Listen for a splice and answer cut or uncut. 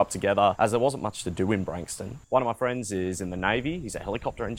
cut